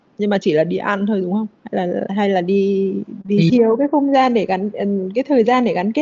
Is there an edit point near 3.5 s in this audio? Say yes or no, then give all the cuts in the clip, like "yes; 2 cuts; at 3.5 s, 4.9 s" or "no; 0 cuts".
yes; 1 cut; at 3.5 s